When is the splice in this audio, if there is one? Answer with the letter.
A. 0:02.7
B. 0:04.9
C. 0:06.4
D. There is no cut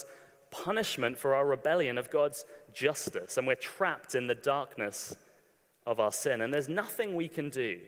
D